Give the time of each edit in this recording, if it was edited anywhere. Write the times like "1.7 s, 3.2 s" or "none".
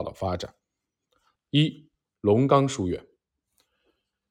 1.4 s